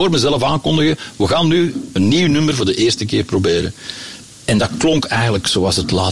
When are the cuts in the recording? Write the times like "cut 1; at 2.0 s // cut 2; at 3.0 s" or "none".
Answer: cut 1; at 1.9 s // cut 2; at 4.2 s